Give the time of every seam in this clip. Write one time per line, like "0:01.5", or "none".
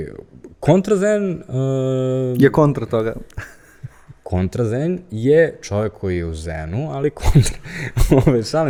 none